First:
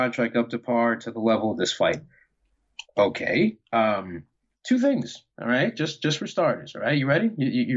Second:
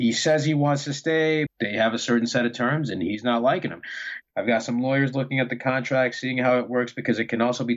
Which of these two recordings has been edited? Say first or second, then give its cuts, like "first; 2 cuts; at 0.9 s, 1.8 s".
second; 2 cuts; at 1.5 s, 4.2 s